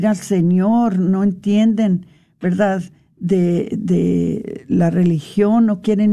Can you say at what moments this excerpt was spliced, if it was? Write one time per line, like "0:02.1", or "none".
none